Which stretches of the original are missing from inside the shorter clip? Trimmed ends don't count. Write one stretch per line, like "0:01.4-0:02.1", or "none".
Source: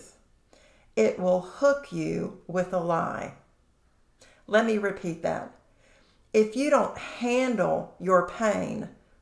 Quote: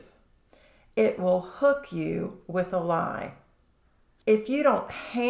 0:04.2-0:06.3

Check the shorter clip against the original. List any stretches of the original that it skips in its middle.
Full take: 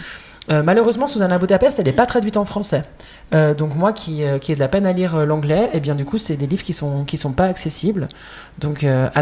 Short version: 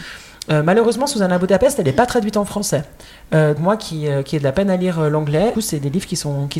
0:03.6-0:03.7
0:05.7-0:06.1

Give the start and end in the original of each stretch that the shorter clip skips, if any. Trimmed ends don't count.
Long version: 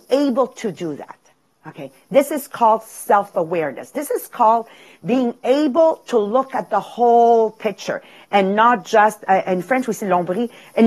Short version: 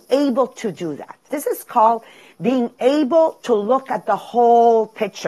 0:01.3-0:03.9

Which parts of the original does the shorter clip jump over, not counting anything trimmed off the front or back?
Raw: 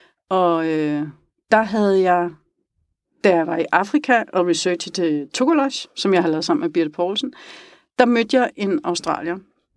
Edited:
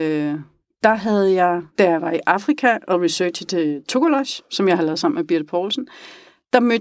0:02.4-0:03.1

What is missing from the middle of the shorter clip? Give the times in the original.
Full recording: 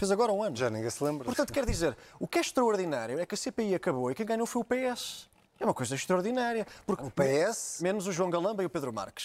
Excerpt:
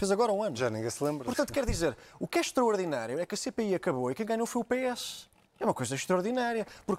none

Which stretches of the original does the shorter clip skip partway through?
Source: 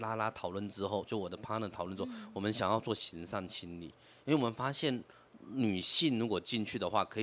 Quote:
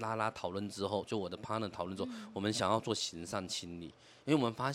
none

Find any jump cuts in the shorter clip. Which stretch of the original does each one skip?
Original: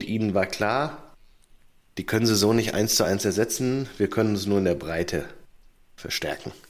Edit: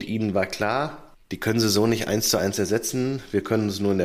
0:01.2-0:01.9

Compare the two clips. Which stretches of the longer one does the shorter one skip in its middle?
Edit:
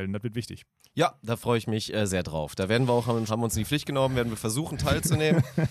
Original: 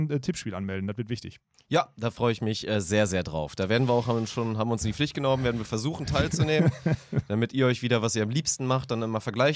0:02.8-0:03.1
0:04.3-0:04.6

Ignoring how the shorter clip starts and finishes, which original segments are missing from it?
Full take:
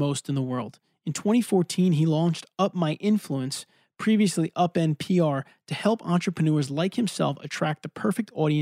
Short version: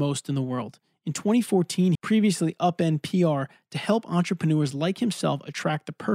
0:01.9-0:03.9

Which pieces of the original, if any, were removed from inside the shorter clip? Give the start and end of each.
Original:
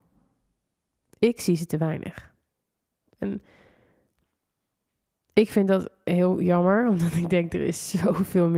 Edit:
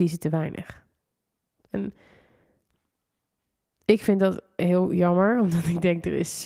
none

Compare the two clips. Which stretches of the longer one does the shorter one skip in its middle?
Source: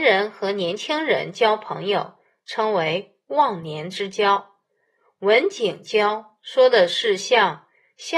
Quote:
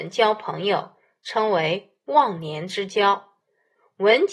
none

